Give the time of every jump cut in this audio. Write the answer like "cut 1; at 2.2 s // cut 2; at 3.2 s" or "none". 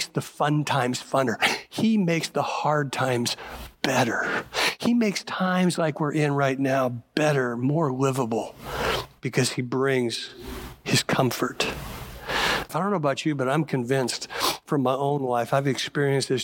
cut 1; at 12.7 s